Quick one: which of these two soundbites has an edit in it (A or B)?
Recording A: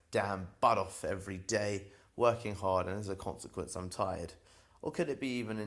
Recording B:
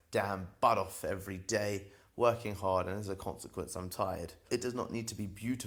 B